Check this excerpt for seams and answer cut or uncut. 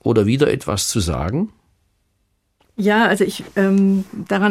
uncut